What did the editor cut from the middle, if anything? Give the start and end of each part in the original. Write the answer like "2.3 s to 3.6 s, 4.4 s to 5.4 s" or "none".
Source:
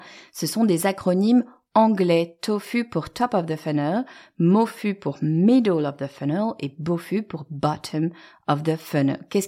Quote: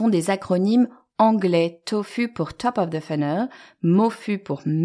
none